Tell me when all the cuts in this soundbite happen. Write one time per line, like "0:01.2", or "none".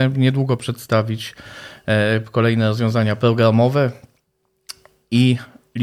none